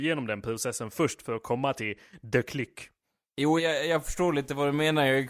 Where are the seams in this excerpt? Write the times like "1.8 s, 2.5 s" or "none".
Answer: 3.6 s